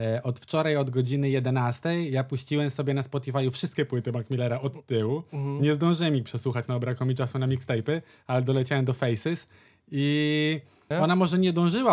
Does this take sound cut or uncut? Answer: cut